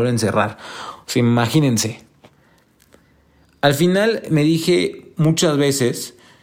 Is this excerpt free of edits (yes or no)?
yes